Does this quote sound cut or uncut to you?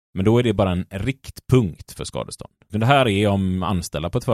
cut